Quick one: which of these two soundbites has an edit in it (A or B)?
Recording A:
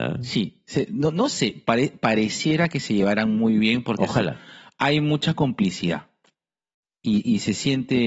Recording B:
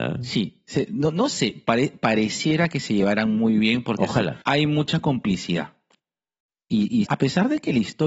B